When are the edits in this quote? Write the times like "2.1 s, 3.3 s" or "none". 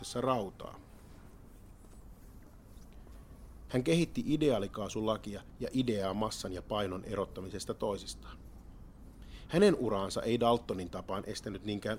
3.7 s